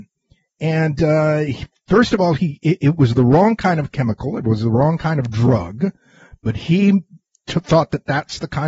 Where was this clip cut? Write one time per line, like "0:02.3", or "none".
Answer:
none